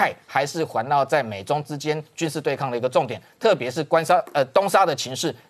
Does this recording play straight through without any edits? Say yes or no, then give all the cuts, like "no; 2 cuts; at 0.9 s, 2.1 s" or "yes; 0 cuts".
yes; 0 cuts